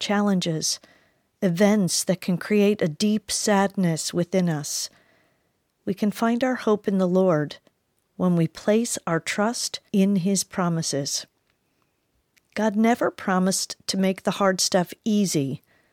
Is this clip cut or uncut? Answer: cut